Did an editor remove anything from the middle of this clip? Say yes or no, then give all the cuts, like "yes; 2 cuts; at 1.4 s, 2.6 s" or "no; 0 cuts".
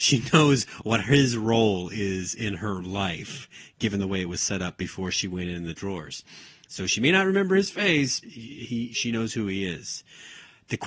yes; 1 cut; at 8.2 s